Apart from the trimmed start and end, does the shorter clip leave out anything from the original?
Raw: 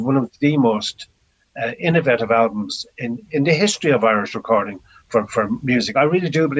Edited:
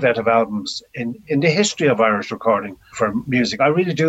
yes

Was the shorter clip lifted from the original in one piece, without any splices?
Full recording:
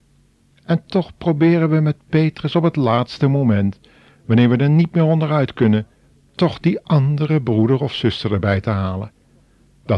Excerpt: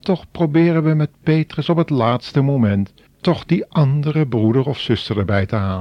no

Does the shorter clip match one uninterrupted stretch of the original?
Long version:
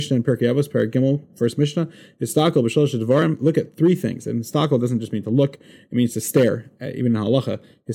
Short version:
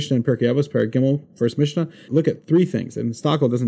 no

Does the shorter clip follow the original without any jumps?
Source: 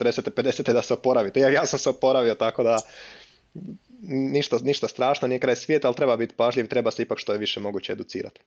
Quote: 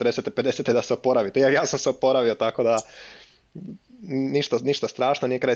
yes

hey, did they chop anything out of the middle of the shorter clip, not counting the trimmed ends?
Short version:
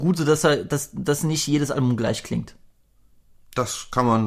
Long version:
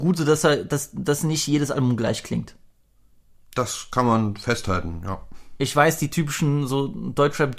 no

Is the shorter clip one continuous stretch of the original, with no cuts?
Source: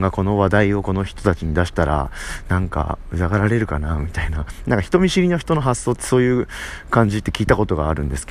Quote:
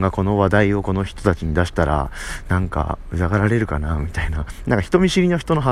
yes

